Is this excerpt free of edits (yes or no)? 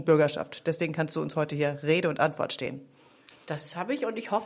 no